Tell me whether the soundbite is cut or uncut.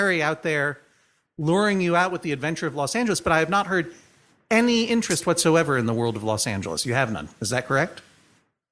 uncut